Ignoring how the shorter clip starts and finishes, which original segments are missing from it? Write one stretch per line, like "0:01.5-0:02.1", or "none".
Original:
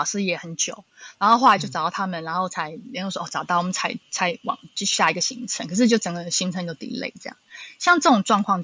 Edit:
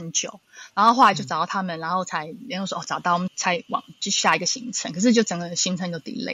0:03.7-0:04.0

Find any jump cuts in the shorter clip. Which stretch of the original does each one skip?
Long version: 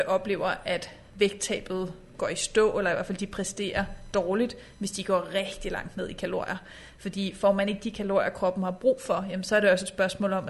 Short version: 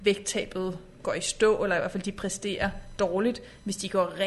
none

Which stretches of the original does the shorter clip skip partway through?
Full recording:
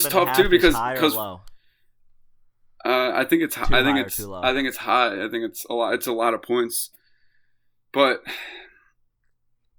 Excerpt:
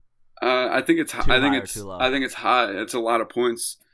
0:05.3-0:06.0

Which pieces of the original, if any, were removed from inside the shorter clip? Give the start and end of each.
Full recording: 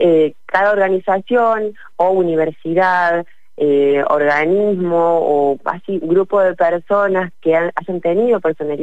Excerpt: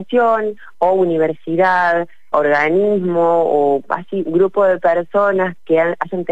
0:03.5-0:04.1

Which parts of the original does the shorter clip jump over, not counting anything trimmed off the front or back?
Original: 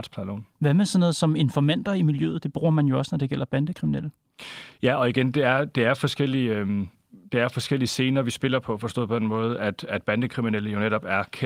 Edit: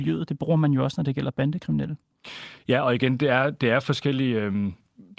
none

